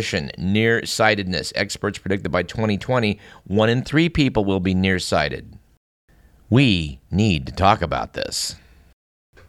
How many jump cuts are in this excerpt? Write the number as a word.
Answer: zero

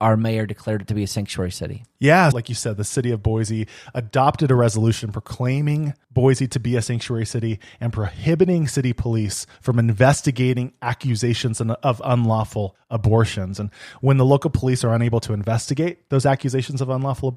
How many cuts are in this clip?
one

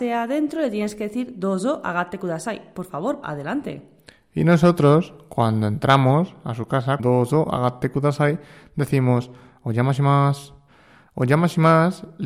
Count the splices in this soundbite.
two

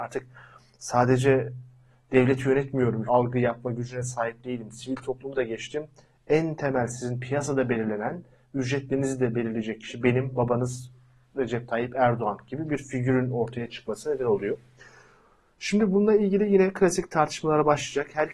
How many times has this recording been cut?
one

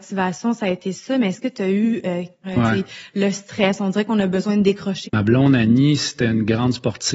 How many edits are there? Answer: two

